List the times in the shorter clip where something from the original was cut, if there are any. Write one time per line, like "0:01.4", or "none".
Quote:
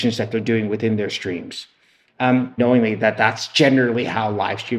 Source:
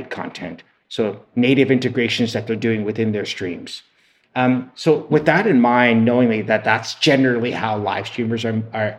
0:02.6